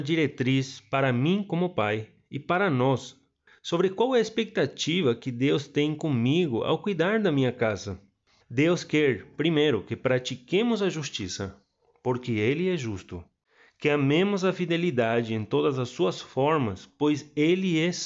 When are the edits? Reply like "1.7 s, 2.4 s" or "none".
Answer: 8.4 s